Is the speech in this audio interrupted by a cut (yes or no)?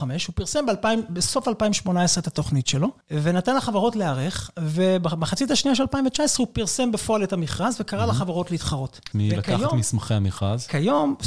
yes